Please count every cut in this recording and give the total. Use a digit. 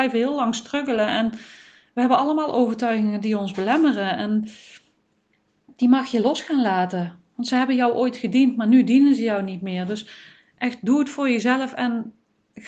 0